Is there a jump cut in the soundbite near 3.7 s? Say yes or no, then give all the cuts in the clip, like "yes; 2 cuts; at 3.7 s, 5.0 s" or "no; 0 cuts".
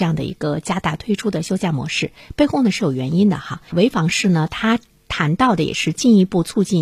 yes; 1 cut; at 3.7 s